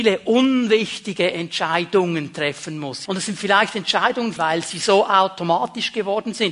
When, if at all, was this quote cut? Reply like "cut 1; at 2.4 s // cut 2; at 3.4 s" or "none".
cut 1; at 3.1 s // cut 2; at 4.4 s